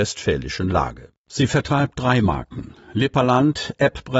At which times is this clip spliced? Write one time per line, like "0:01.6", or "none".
0:01.2